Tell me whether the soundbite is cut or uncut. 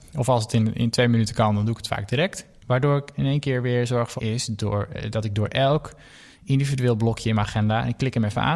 cut